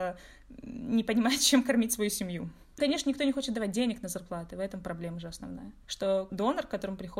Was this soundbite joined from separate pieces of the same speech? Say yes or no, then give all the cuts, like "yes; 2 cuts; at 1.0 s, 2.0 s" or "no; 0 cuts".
yes; 1 cut; at 2.7 s